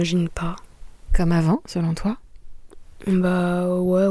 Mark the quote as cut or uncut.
uncut